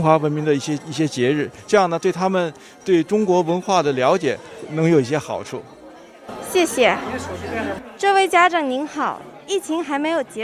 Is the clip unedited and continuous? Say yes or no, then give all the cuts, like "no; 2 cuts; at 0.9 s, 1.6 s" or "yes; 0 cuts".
yes; 0 cuts